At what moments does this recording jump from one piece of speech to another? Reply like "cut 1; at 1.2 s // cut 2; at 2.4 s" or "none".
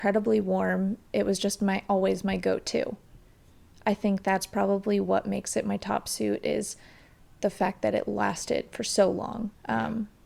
none